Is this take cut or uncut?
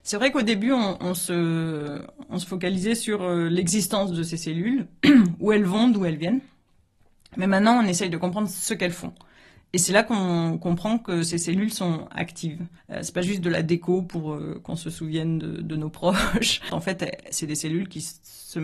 cut